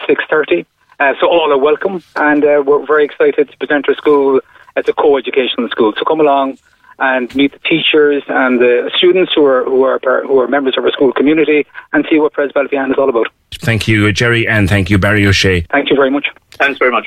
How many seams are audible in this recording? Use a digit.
1